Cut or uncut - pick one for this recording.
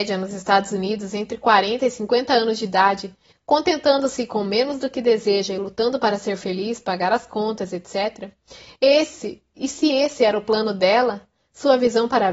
uncut